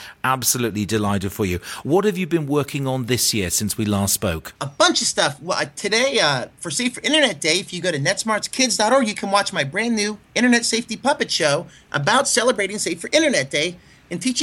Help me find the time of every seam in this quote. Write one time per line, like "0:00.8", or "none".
none